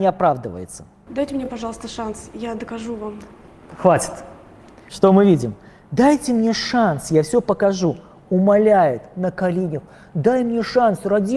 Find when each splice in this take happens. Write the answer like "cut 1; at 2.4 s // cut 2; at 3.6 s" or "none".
none